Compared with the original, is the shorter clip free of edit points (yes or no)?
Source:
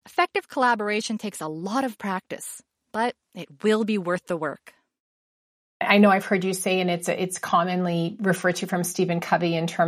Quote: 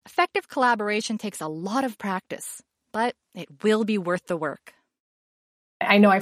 yes